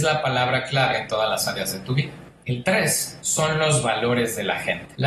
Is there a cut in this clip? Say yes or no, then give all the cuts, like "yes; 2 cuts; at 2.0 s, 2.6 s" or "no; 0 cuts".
no; 0 cuts